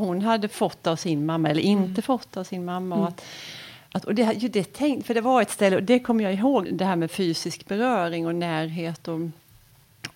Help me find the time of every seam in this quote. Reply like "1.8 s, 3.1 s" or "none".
6.7 s